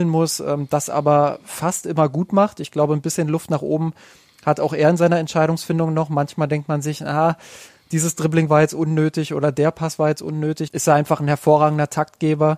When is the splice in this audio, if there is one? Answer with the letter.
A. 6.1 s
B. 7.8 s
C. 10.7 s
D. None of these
C